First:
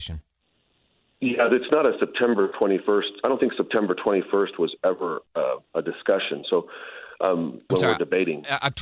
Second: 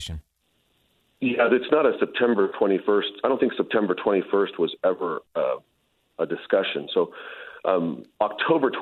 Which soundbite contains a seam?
first; 2 cuts; at 5.7 s, 7.7 s

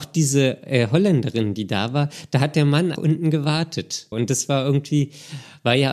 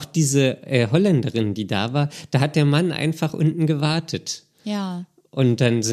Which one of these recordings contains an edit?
first; 2 cuts; at 3.0 s, 4.1 s

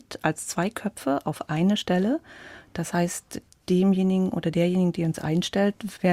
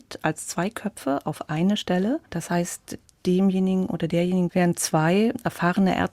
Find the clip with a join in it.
second; 2 cuts; at 2.3 s, 4.5 s

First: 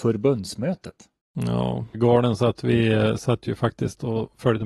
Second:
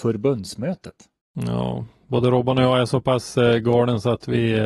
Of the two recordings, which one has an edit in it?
first; 1 cut; at 1.9 s

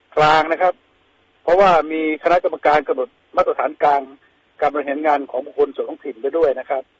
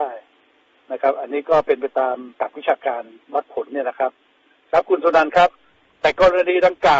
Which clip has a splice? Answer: second; 1 cut; at 2.3 s

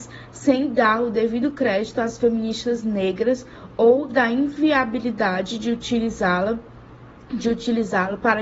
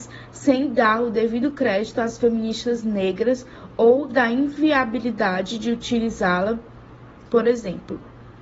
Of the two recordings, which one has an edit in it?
second; 1 cut; at 7.3 s

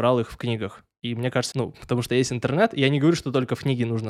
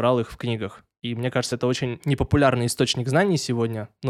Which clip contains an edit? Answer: first; 1 cut; at 1.5 s

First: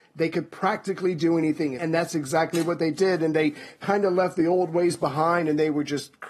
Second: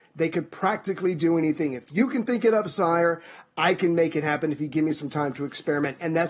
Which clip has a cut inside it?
first; 1 cut; at 1.8 s

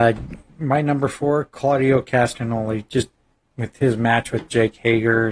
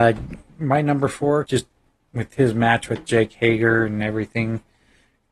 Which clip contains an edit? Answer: second; 1 cut; at 1.5 s

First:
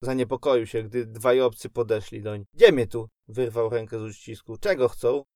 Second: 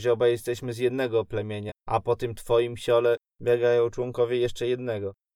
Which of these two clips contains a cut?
first; 1 cut; at 2.5 s

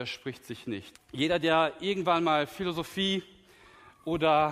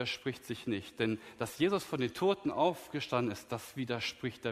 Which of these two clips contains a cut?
first; 1 cut; at 0.9 s

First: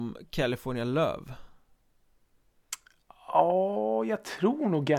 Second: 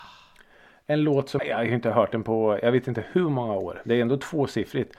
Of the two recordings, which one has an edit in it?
second; 1 cut; at 1.4 s

